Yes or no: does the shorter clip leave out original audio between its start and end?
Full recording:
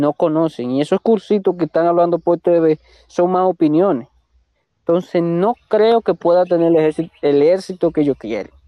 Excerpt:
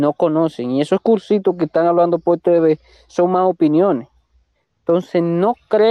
no